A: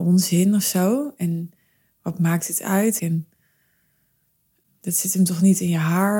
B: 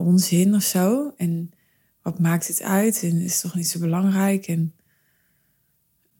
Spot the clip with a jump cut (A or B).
A